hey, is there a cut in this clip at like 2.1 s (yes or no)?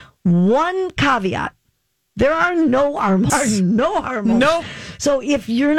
no